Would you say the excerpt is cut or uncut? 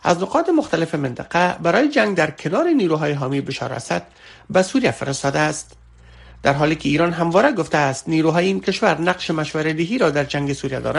uncut